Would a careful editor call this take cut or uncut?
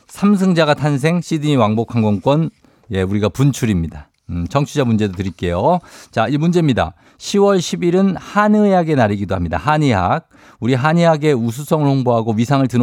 uncut